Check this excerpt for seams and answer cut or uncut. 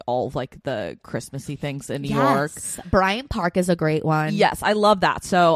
uncut